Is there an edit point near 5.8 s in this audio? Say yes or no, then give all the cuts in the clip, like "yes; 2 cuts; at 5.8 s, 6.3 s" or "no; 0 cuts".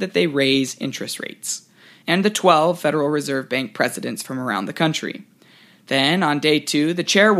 no; 1 cut; at 2.0 s